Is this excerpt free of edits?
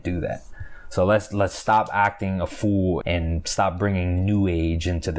no; 1 cut; at 3.0 s

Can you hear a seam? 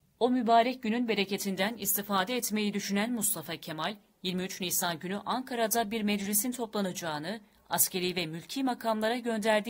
no; 0 cuts

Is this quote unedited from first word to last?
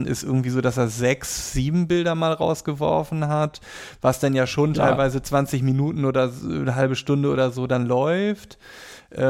yes; 0 cuts

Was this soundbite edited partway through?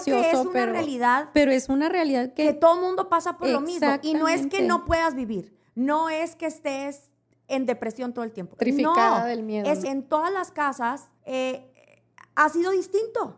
yes; 3 cuts; at 8.6 s, 9.8 s, 11.2 s

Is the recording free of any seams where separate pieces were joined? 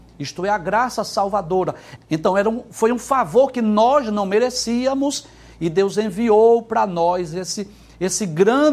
no; 1 cut; at 2.0 s

